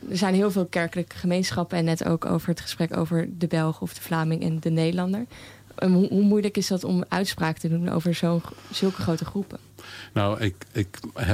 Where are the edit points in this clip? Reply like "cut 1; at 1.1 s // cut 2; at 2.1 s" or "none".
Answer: none